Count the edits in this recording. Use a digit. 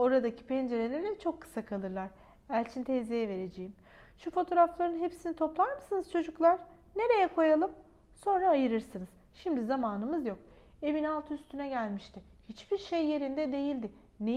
0